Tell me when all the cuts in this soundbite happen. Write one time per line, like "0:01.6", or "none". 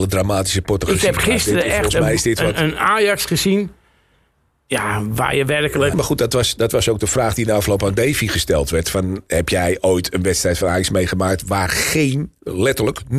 0:05.9